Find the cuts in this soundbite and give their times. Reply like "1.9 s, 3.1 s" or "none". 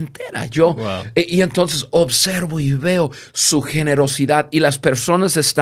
none